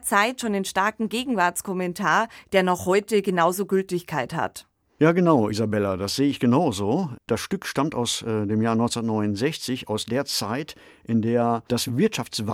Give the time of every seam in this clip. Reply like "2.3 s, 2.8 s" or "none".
none

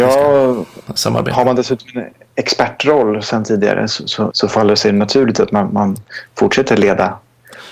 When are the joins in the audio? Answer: 4.3 s

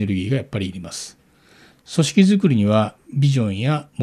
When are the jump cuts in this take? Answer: 1.7 s

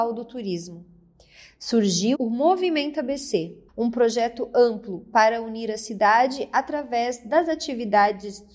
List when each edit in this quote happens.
2.1 s, 3.7 s

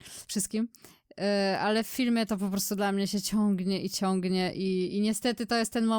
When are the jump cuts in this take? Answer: none

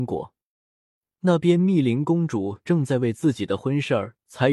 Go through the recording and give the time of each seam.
none

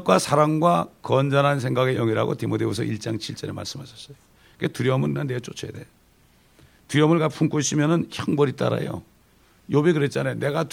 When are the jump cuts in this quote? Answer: none

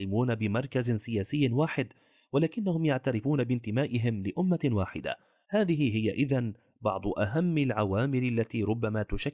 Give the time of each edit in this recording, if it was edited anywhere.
5.4 s

